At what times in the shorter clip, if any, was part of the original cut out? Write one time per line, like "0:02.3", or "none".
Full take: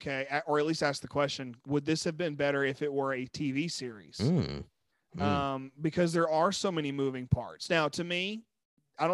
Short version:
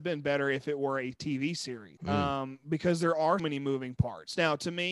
0:02.0
0:03.4